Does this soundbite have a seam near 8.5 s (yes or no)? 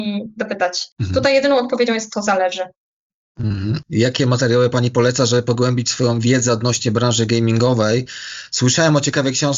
no